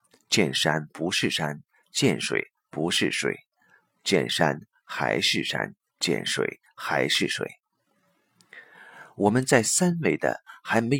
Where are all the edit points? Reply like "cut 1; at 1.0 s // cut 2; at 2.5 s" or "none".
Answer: none